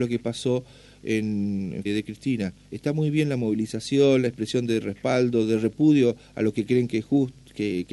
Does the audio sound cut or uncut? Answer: cut